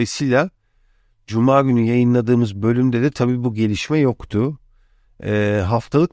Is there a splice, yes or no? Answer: no